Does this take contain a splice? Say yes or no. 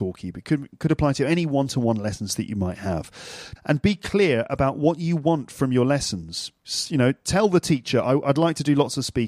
yes